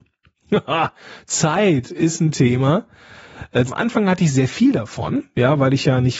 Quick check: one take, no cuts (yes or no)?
no